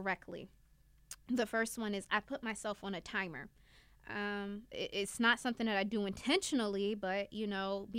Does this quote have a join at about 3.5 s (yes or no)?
no